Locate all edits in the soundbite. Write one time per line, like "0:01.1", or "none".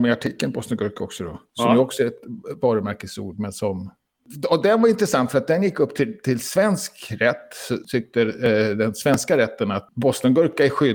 0:01.5